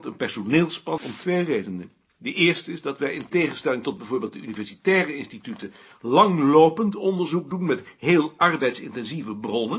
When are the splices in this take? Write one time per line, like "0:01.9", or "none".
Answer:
0:01.0